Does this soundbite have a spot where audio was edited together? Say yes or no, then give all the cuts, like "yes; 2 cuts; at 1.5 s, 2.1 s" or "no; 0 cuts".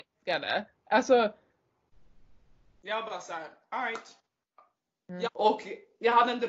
yes; 1 cut; at 5.2 s